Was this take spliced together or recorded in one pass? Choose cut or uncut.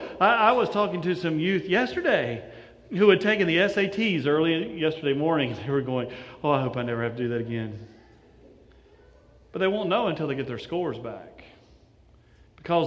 uncut